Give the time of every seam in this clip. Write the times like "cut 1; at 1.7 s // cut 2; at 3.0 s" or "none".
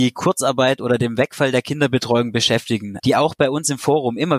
cut 1; at 3.0 s

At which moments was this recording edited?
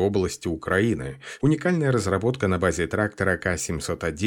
cut 1; at 1.4 s

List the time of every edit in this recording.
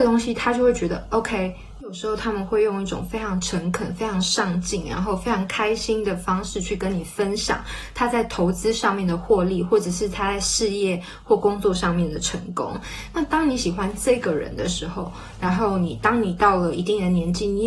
cut 1; at 1.8 s

